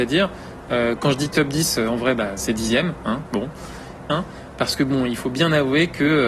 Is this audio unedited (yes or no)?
no